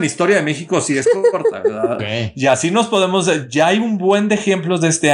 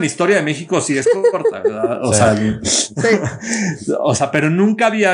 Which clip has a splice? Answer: first; 1 cut; at 2.0 s

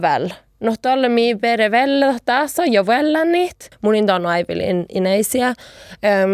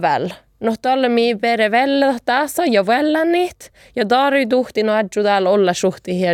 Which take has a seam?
first; 1 cut; at 3.7 s

